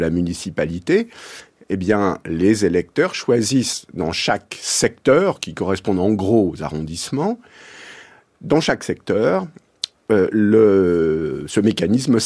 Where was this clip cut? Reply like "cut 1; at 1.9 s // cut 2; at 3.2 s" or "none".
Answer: none